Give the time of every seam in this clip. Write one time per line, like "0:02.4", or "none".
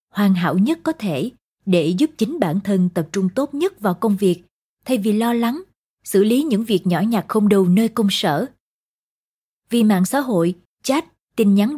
0:10.7

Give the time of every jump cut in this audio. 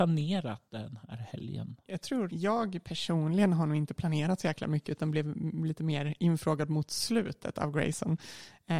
0:02.3

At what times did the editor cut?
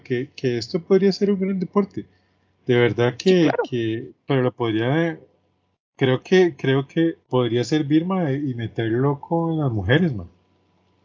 0:04.3
0:07.2

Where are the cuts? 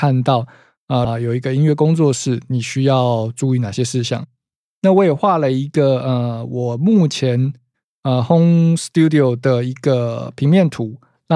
0:01.0

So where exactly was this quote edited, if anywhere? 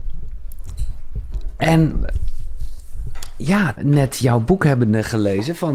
0:03.8

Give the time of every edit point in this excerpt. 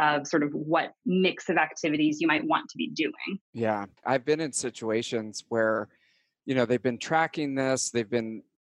0:04.0

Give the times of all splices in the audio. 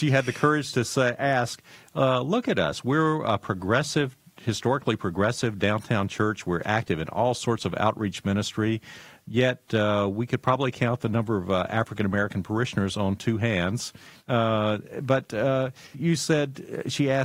0:14.2
0:15.9

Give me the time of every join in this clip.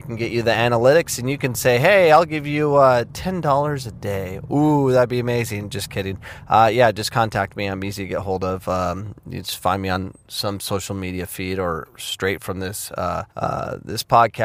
0:13.3

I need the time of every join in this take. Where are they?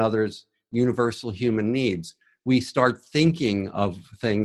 none

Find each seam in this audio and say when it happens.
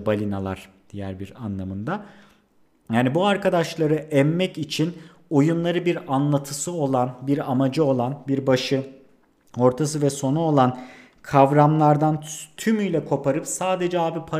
none

